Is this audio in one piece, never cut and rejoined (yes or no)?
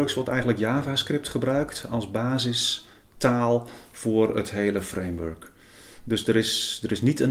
yes